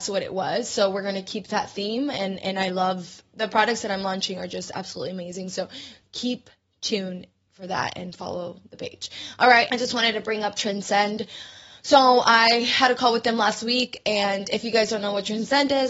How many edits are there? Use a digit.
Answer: 1